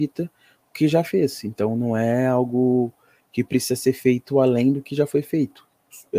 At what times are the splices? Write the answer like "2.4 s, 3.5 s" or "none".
none